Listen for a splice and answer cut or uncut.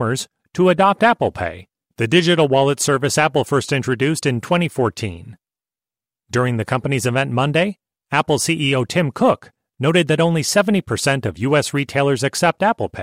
uncut